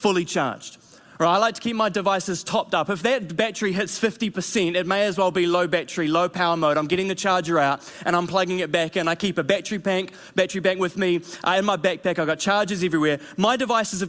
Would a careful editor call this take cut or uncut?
uncut